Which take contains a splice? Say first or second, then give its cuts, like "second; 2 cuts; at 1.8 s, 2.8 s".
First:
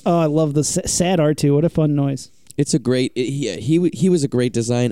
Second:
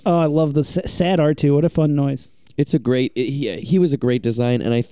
second; 1 cut; at 3.6 s